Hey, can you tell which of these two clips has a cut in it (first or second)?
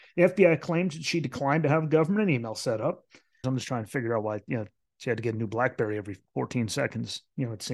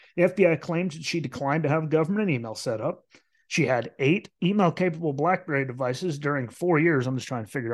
first